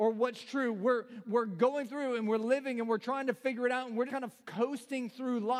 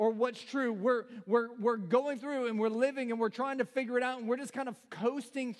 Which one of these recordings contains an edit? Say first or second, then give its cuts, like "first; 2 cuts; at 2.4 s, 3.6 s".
first; 2 cuts; at 1.2 s, 4.1 s